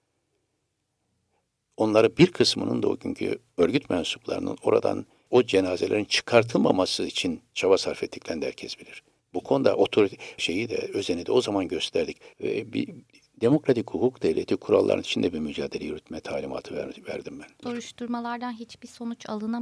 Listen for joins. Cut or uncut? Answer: cut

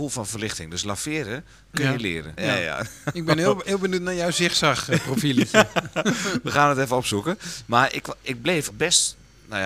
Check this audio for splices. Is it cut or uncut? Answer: cut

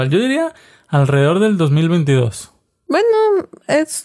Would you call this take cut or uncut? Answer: uncut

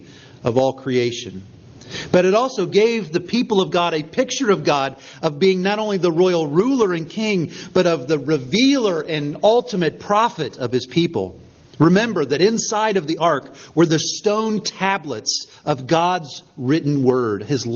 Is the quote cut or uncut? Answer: uncut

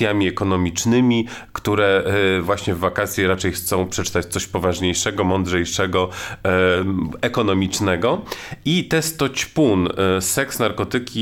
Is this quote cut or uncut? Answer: uncut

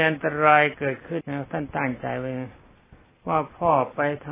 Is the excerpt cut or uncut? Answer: cut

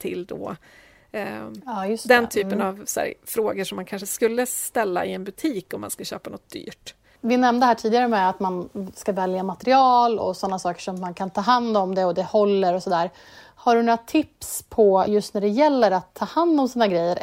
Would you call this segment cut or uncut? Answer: uncut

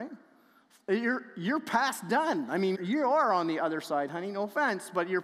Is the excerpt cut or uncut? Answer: cut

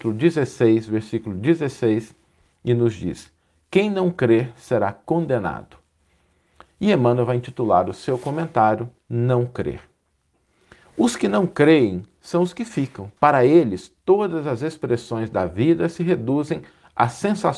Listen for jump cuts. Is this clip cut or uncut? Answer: cut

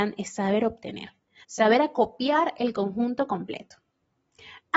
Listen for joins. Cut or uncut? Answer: cut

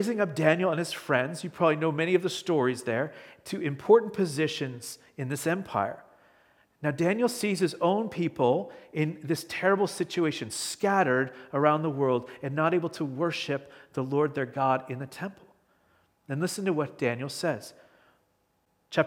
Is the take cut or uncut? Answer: uncut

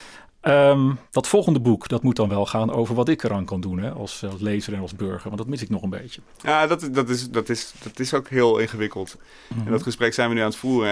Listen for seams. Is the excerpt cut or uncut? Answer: cut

